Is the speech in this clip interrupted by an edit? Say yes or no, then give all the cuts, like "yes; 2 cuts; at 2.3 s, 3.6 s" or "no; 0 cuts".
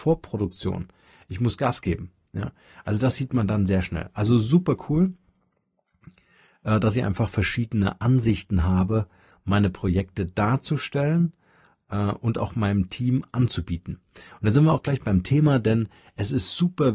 no; 0 cuts